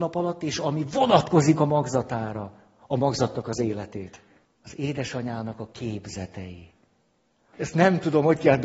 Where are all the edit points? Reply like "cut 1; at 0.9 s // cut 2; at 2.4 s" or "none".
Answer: cut 1; at 4.5 s // cut 2; at 7.5 s